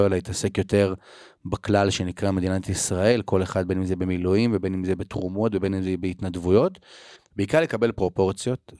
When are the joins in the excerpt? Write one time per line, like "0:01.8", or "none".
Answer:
0:07.2